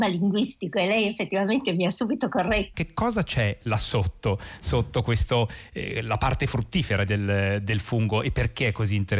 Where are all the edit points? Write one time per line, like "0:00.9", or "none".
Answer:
0:02.7
0:07.1